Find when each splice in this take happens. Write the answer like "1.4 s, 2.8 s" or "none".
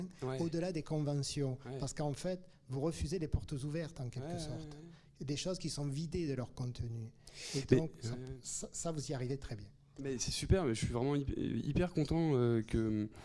none